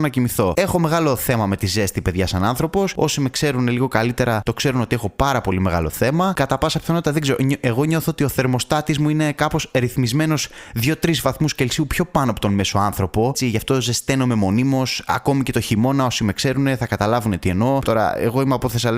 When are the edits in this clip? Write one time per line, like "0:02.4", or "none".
0:17.8